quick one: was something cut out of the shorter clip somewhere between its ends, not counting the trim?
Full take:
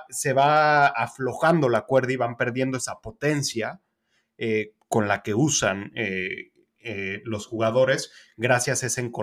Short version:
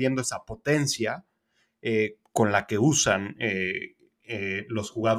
no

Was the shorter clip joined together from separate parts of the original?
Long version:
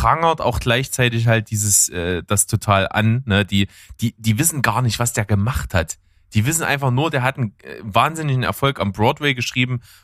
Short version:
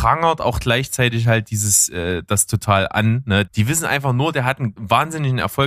yes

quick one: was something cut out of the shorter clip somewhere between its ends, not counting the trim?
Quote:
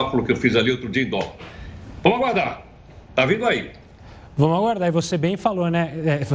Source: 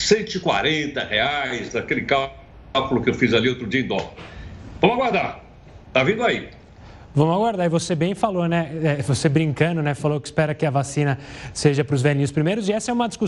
no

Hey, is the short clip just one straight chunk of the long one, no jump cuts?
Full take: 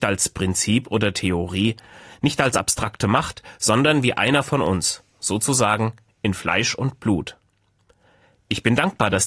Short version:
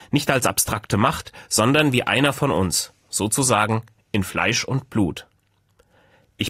yes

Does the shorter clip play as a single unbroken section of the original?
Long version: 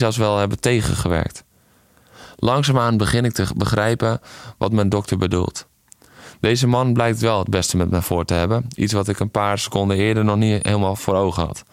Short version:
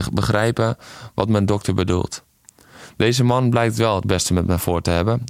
yes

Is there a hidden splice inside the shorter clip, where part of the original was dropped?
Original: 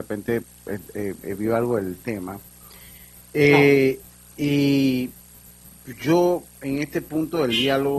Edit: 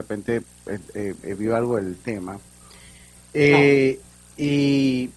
no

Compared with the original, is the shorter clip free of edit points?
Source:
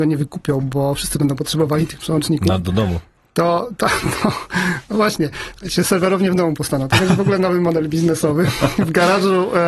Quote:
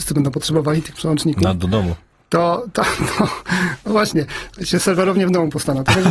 yes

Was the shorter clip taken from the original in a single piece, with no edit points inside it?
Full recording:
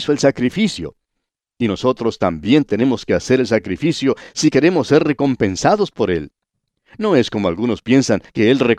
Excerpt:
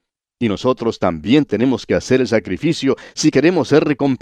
yes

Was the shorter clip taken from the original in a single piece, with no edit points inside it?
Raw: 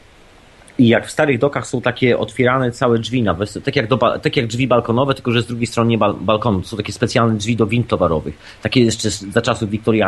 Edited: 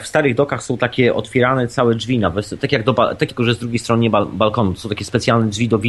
no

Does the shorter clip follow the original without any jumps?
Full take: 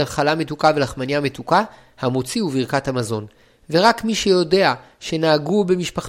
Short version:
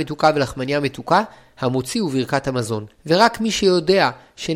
no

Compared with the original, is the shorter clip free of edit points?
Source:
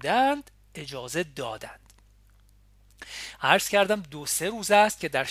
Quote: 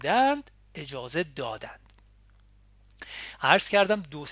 yes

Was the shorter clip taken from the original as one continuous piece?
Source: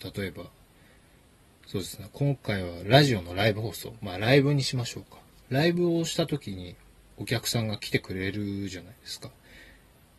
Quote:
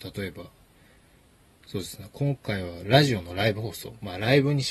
yes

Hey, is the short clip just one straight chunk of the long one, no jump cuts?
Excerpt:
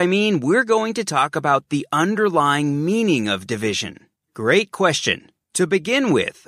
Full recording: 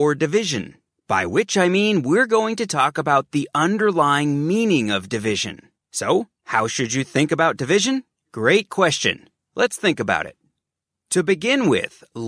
no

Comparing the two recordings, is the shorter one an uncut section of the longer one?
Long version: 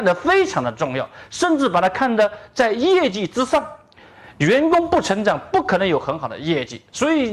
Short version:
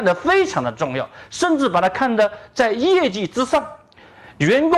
yes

